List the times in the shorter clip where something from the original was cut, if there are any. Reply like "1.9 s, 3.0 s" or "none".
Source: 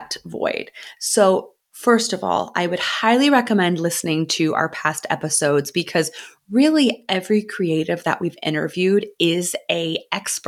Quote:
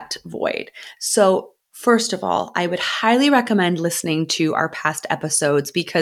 none